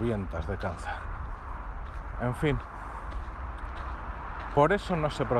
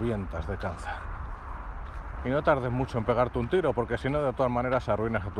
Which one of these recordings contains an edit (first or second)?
second